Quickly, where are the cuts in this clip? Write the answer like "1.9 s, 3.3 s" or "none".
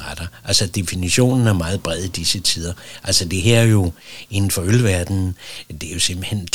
none